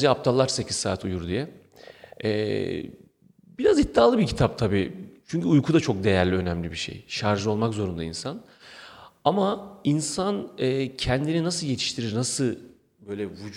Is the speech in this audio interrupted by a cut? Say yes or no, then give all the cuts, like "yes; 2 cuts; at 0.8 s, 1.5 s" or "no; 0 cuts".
no; 0 cuts